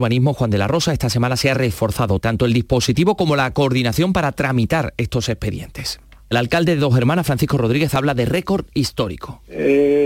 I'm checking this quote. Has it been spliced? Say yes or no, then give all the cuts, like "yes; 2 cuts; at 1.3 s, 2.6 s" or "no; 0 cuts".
yes; 2 cuts; at 2.2 s, 6.3 s